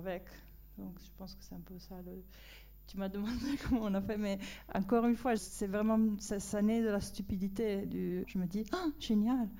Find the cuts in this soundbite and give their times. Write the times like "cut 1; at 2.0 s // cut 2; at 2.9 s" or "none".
cut 1; at 5.4 s // cut 2; at 8.2 s